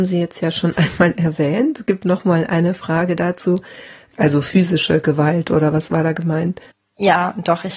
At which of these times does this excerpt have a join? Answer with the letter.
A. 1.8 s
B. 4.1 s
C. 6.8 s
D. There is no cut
B